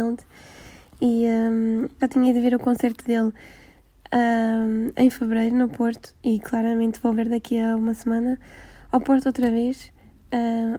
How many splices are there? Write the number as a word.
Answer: one